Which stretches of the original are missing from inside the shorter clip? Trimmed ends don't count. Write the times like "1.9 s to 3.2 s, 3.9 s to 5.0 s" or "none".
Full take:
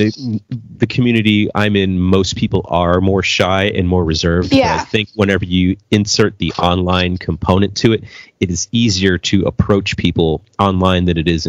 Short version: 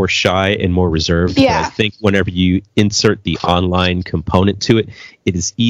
none